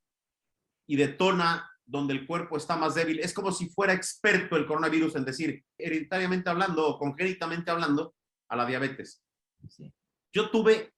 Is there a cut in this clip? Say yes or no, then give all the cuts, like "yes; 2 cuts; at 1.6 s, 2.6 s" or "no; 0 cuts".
yes; 1 cut; at 5.8 s